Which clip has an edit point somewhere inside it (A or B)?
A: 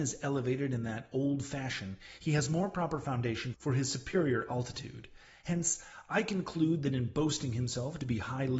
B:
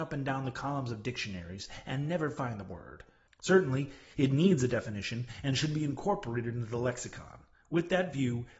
B